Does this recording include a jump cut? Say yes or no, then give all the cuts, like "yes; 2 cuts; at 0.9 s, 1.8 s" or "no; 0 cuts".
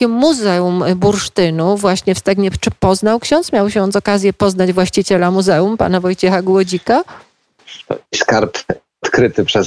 yes; 1 cut; at 8.1 s